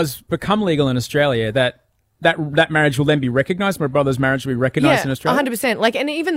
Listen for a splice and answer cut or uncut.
uncut